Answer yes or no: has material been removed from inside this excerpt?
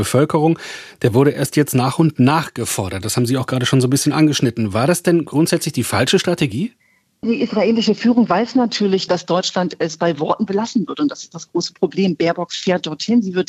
no